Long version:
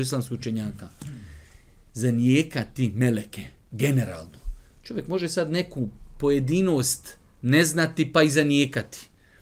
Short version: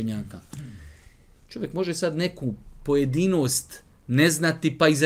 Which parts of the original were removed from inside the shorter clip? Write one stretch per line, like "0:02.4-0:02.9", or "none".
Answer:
0:01.8-0:04.7